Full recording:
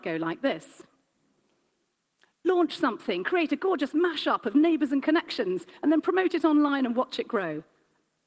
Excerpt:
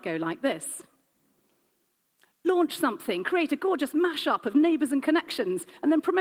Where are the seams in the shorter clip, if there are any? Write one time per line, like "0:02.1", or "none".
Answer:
none